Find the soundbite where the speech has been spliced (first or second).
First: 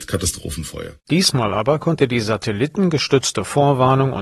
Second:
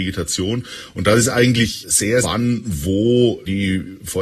second